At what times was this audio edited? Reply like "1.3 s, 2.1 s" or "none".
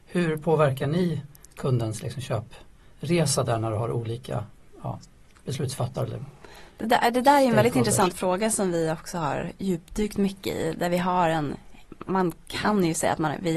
none